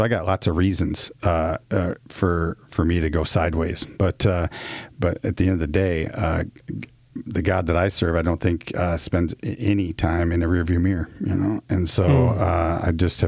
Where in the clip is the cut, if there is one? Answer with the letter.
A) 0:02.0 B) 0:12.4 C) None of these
C